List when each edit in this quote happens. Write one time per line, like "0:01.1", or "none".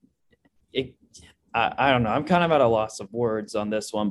none

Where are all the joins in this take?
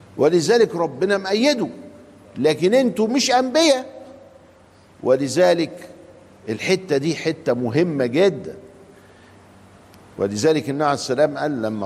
none

